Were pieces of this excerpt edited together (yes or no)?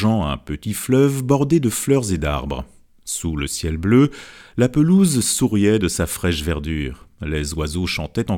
no